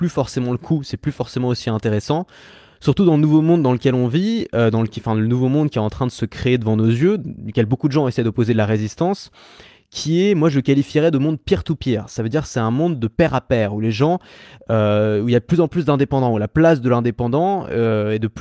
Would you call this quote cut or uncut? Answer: uncut